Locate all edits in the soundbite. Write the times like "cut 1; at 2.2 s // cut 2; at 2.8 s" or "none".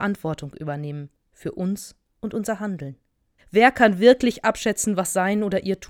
cut 1; at 3.4 s